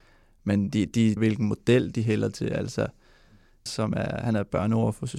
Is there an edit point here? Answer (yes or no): yes